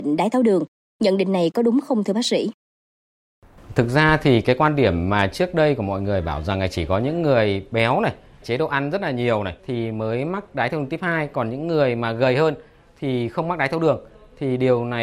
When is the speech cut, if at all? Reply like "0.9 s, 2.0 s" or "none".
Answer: 8.4 s, 9.6 s